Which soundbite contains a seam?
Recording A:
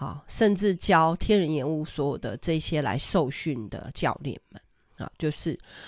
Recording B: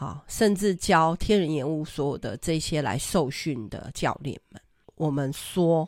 B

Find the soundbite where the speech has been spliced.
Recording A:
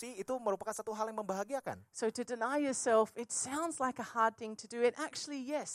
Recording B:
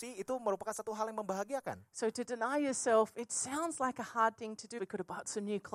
B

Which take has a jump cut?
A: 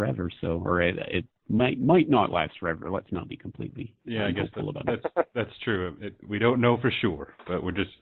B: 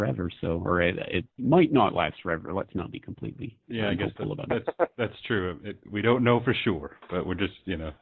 B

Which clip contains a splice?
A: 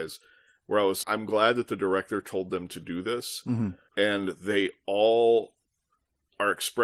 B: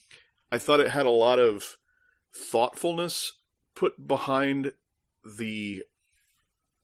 A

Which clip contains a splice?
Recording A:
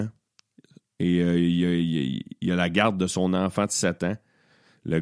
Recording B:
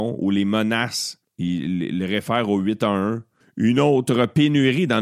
B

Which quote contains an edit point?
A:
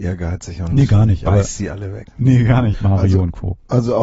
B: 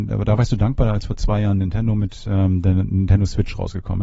A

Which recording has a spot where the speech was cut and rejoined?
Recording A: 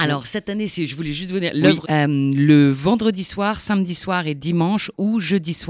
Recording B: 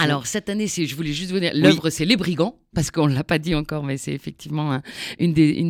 A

